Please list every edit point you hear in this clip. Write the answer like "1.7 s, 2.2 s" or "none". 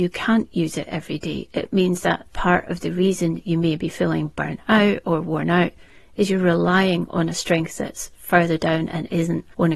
none